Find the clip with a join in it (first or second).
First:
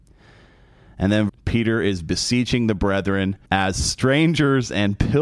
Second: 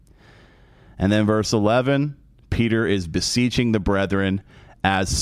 first